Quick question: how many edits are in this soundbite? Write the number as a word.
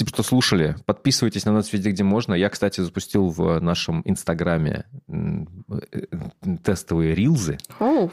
zero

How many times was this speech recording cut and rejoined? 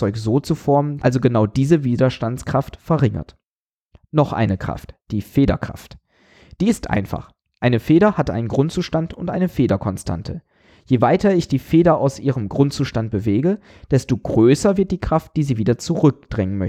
one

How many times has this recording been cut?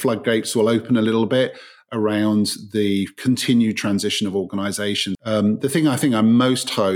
one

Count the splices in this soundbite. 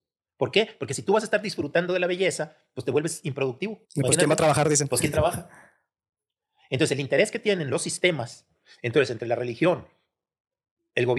one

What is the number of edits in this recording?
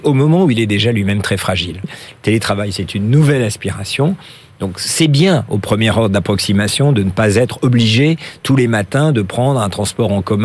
one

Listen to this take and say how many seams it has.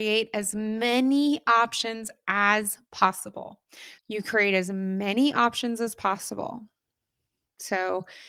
one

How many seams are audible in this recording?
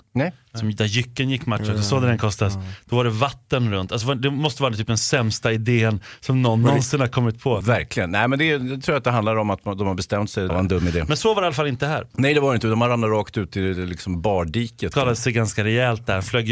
three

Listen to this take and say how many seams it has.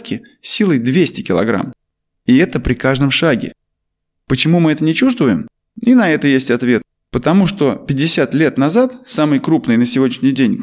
zero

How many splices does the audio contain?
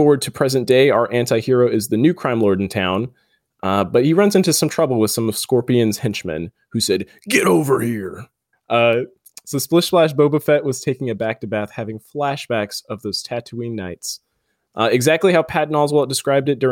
one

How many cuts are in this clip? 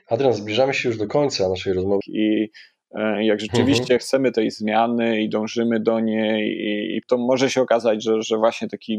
two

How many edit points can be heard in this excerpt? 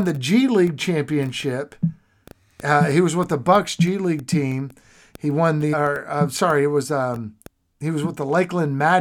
one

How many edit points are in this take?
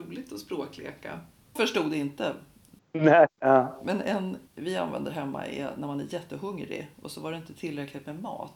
two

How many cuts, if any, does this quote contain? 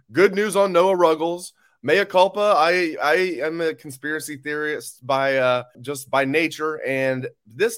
one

